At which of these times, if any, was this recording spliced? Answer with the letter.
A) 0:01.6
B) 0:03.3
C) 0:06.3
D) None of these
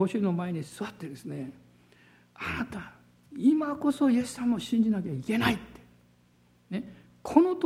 D